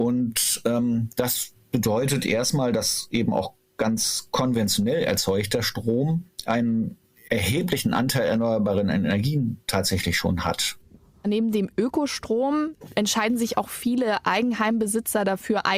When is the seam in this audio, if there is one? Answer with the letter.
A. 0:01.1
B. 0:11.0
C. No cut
C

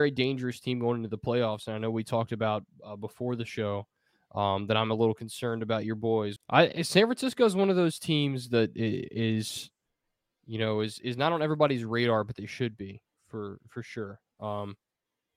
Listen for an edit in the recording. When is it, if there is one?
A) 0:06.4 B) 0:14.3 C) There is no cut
A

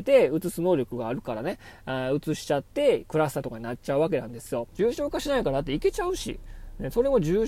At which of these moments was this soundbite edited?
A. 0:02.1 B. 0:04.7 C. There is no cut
B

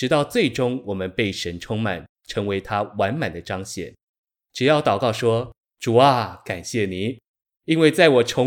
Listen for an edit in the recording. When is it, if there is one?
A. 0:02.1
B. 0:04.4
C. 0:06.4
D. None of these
D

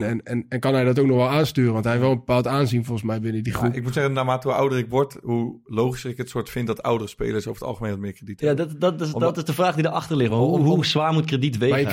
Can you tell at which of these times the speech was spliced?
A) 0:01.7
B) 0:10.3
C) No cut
C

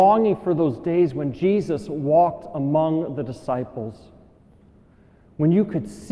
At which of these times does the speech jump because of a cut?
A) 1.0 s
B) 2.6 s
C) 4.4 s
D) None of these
D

